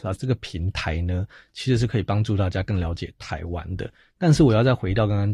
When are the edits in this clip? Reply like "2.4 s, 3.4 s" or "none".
none